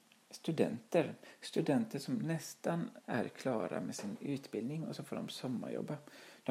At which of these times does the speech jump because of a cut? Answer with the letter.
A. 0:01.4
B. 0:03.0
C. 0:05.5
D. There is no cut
B